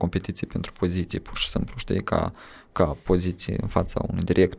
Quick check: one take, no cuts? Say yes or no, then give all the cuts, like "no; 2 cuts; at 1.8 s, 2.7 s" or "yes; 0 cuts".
yes; 0 cuts